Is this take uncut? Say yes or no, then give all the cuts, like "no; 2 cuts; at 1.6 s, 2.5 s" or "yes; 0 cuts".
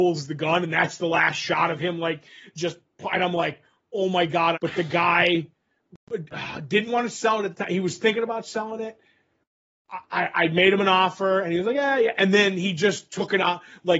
no; 1 cut; at 4.5 s